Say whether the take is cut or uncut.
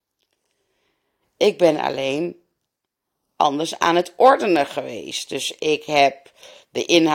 cut